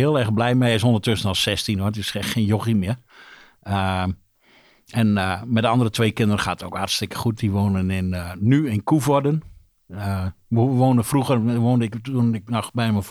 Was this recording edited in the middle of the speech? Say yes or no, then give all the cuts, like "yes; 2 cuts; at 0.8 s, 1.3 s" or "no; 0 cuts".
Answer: no; 0 cuts